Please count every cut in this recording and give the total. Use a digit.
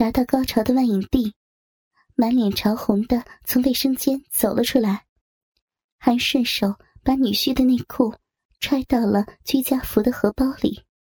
0